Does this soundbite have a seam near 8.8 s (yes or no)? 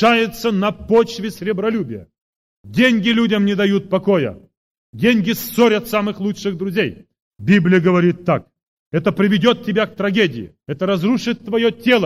no